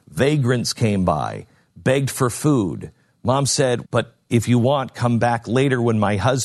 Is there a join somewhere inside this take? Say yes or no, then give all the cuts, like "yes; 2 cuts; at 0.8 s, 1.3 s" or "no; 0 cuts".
yes; 1 cut; at 3.8 s